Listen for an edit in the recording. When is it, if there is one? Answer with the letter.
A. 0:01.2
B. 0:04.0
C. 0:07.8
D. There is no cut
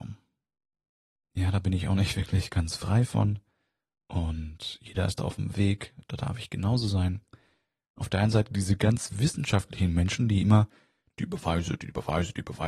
A